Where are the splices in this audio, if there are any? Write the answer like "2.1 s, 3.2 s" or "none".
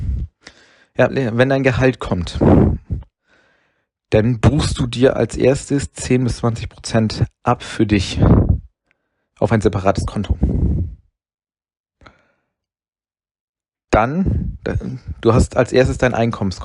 1.1 s